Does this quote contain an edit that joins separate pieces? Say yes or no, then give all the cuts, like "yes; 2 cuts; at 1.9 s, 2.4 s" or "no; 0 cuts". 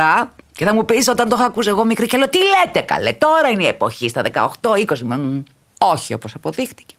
no; 0 cuts